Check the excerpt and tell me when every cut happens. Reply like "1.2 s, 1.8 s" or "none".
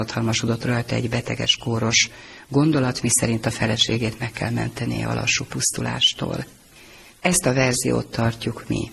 none